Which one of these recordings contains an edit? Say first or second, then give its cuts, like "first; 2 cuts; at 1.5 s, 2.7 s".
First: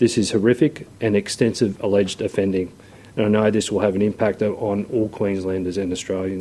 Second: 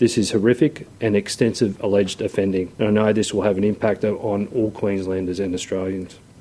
second; 1 cut; at 2.7 s